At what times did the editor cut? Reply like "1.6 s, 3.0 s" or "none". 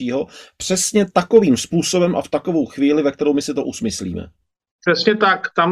none